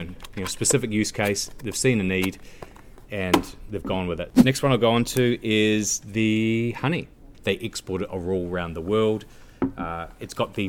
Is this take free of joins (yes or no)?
no